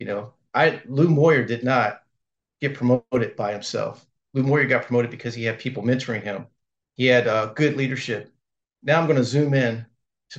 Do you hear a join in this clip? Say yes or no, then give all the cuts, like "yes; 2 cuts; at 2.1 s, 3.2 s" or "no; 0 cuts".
yes; 1 cut; at 8.6 s